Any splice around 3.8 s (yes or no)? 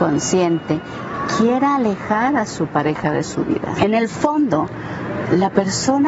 yes